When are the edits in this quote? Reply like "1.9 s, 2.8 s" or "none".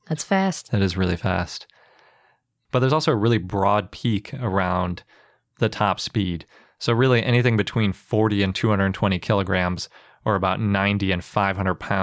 none